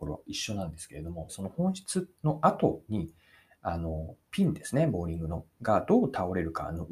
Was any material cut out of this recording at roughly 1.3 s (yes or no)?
yes